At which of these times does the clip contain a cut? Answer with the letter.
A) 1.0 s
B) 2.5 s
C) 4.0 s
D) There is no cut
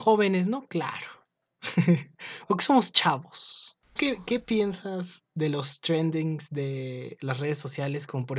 C